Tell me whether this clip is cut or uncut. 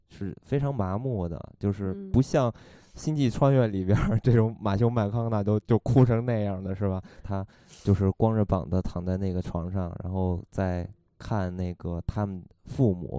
cut